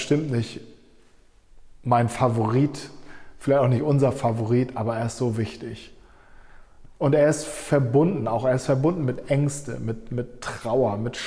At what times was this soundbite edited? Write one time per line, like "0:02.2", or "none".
none